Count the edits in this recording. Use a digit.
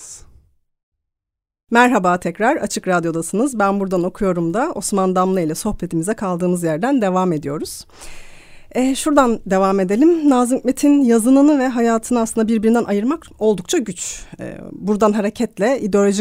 0